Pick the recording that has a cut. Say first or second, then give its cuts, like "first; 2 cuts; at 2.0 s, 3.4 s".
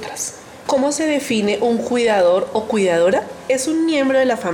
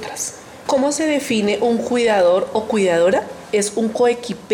second; 1 cut; at 3.4 s